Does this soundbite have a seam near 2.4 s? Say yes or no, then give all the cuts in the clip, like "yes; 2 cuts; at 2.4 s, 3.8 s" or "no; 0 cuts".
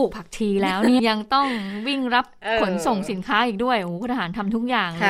no; 1 cut; at 1.0 s